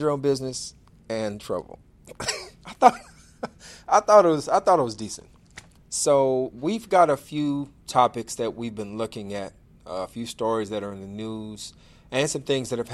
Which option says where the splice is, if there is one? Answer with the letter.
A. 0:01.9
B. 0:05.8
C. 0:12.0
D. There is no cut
B